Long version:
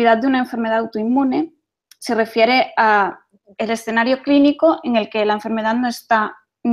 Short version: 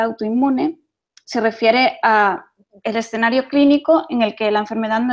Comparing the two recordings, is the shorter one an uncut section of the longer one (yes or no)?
yes